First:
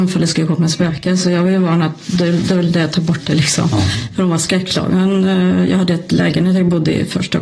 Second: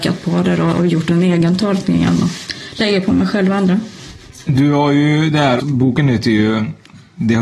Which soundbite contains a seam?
second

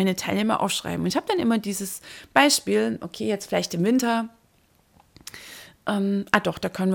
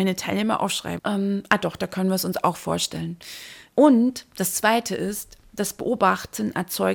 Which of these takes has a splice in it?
second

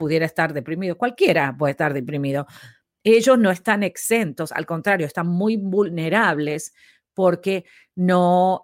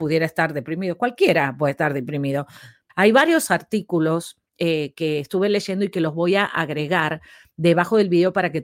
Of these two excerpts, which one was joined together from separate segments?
second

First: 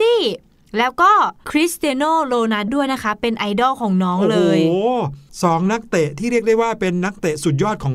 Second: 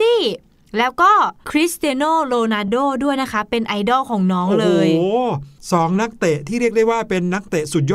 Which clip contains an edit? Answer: first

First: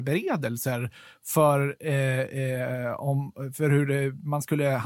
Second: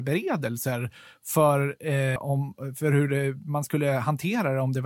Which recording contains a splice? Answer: second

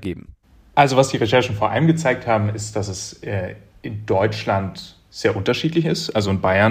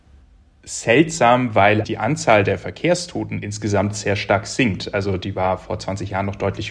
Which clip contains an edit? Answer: second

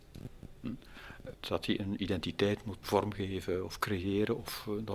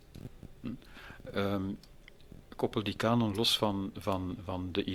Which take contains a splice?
first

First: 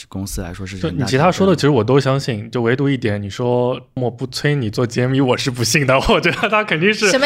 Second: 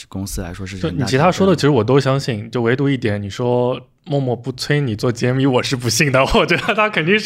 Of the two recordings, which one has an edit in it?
first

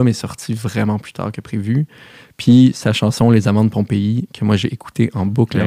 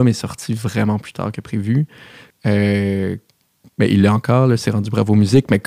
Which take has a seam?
second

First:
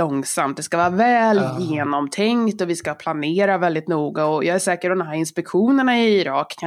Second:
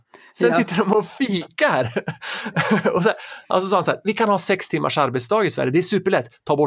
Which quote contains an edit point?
second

